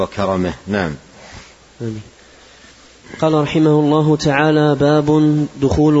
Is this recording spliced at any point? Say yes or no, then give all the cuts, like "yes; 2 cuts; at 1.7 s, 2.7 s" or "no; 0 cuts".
yes; 1 cut; at 1.7 s